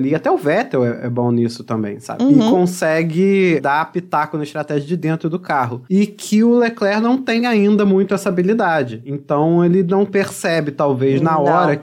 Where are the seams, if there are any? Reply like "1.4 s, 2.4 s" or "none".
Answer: none